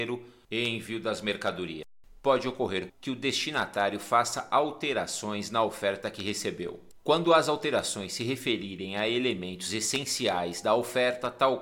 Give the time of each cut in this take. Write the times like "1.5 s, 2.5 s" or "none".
2.9 s